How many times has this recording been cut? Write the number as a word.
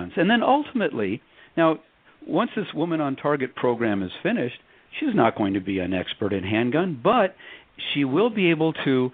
zero